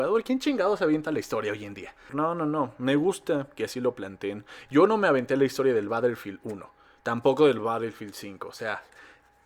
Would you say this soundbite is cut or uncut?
cut